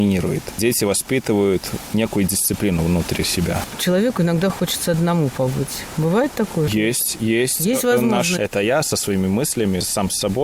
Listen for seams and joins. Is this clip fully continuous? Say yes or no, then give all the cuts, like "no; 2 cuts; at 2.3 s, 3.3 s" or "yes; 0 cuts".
no; 1 cut; at 8.4 s